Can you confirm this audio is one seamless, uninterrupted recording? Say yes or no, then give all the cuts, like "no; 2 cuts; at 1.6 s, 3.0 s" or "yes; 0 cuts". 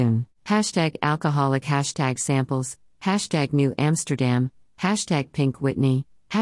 no; 1 cut; at 2.9 s